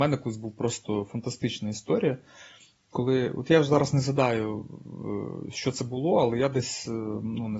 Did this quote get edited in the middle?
no; 0 cuts

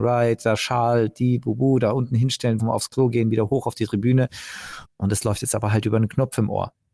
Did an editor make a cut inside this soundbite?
yes; 2 cuts; at 2.6 s, 4.9 s

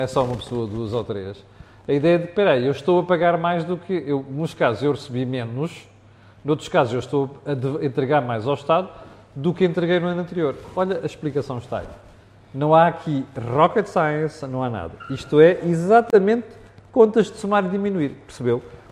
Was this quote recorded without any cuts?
yes; 0 cuts

